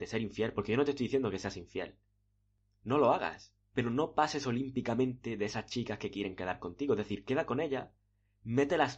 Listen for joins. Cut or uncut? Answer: uncut